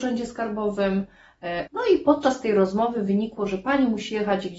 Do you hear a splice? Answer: yes; 1 cut; at 1.7 s

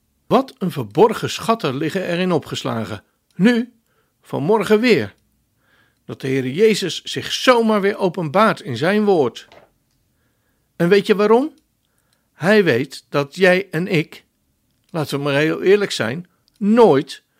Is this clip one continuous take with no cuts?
yes; 0 cuts

